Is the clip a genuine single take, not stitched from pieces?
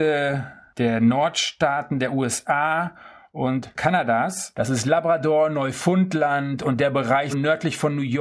no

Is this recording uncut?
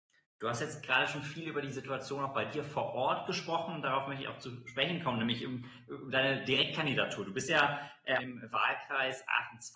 no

